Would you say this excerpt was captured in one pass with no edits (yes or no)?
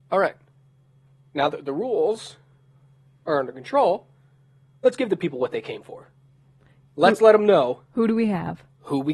yes